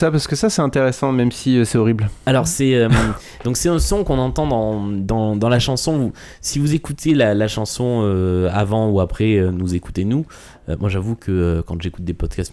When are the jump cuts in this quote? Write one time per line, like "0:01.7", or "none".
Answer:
none

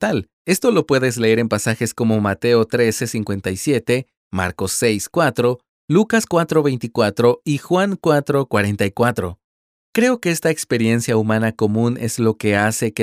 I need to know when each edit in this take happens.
none

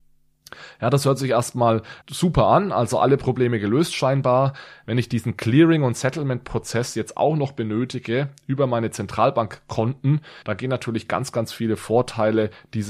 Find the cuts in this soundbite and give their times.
0:02.0
0:04.8
0:10.4

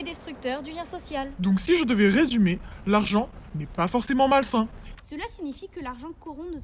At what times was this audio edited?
0:04.9

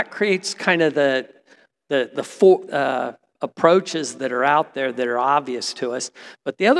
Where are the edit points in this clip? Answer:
0:02.7

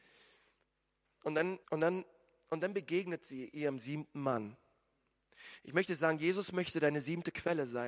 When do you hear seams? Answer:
0:01.6

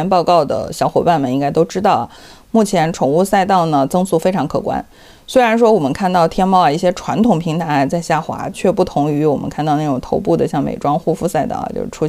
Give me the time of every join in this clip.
0:08.5

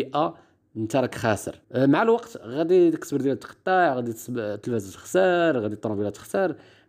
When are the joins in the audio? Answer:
0:01.6

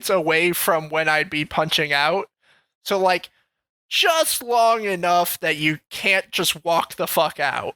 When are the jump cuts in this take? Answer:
none

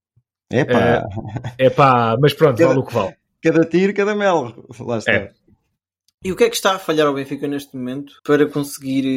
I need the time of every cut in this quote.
0:08.2

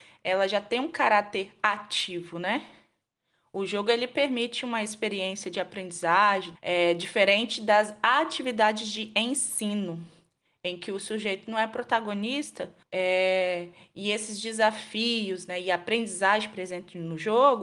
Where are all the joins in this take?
0:06.5
0:12.8

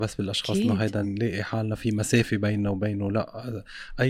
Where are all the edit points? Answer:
0:01.0

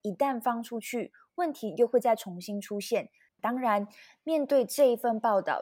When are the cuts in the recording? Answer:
0:03.3

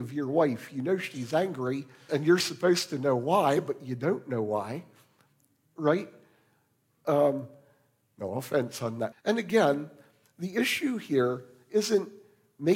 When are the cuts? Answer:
0:02.1
0:09.1

